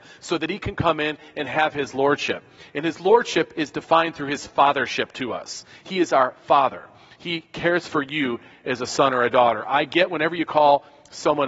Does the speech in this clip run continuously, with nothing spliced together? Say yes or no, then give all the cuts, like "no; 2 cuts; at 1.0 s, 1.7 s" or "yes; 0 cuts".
yes; 0 cuts